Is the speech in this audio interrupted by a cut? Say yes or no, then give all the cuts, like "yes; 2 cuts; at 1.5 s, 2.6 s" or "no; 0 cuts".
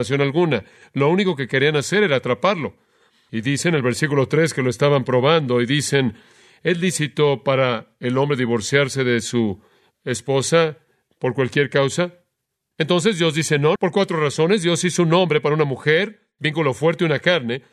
yes; 2 cuts; at 12.7 s, 13.8 s